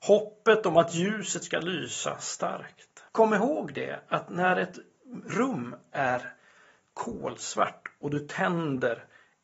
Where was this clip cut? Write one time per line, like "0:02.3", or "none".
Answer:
0:03.1